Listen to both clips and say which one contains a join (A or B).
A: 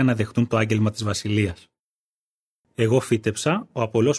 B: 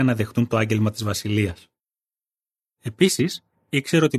A